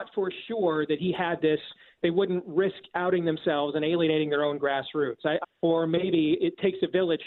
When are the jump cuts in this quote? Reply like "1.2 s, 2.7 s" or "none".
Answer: 5.4 s